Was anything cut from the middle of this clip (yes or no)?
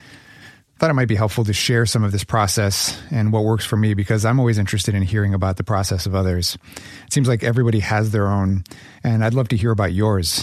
no